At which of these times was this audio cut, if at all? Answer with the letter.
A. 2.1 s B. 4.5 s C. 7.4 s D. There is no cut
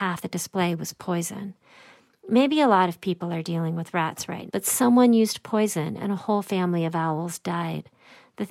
B